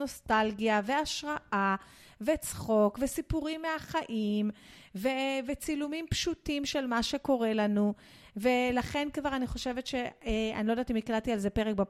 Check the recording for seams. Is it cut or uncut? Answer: uncut